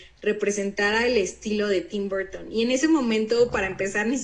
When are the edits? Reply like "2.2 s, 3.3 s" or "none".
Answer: none